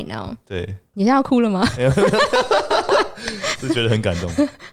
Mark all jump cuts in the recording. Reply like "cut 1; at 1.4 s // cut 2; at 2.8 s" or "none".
cut 1; at 0.9 s